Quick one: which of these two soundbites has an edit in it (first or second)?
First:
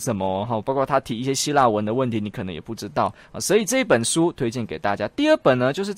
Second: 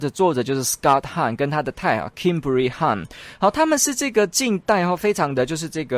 second